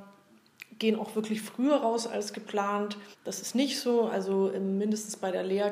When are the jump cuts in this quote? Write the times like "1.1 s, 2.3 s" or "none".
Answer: 3.1 s